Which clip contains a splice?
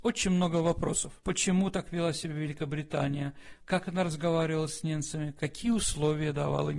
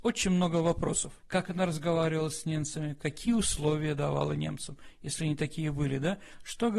second; 1 cut; at 1.2 s

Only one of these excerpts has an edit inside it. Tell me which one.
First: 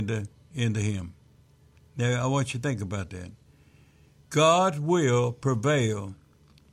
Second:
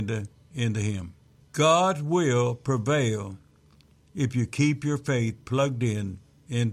second; 1 cut; at 1.4 s

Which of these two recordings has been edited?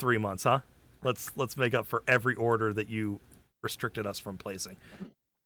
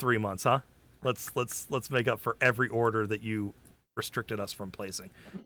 first; 1 cut; at 1.3 s

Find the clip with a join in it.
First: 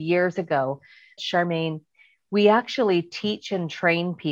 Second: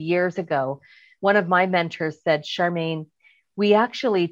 first; 1 cut; at 1.2 s

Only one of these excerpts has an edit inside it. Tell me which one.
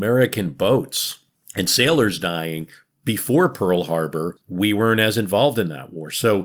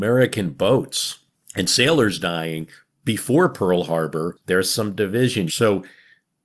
second; 2 cuts; at 4.4 s, 5.5 s

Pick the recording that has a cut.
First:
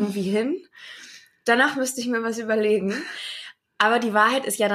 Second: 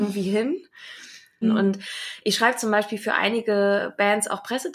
second; 1 cut; at 1.4 s

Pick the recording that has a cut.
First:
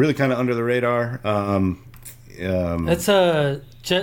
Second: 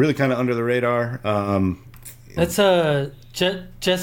second; 1 cut; at 2.4 s

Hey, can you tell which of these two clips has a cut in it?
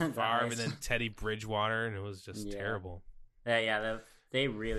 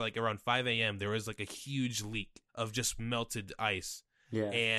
second; 1 cut; at 2.5 s

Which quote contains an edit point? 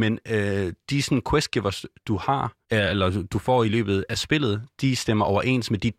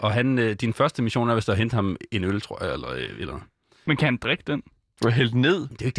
first; 1 cut; at 2.6 s

